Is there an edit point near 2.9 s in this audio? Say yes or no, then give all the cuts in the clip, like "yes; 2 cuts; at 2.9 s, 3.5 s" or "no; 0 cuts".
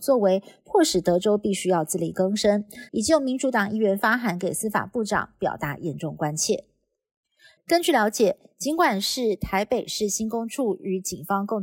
yes; 2 cuts; at 2.9 s, 7.6 s